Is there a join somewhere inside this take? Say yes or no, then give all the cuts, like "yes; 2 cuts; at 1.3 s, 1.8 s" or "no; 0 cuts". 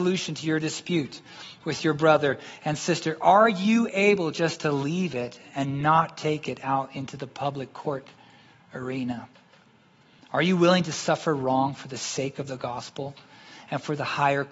no; 0 cuts